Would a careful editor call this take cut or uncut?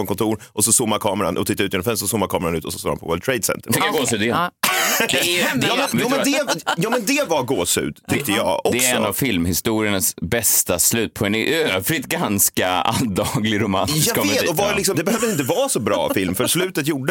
cut